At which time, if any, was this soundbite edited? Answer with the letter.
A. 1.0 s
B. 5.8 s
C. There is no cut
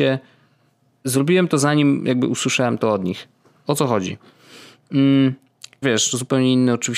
B